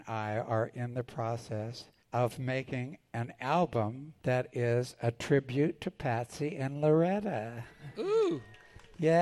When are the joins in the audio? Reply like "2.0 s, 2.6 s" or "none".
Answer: 2.0 s, 4.2 s

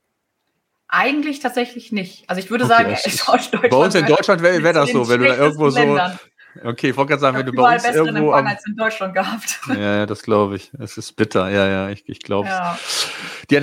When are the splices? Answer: none

